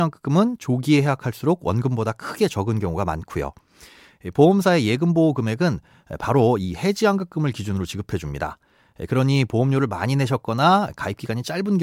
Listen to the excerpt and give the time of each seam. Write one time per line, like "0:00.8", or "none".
none